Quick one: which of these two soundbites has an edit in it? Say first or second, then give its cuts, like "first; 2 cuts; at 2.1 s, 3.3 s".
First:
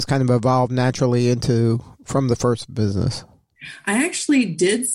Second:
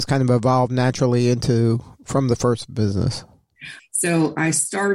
second; 1 cut; at 3.8 s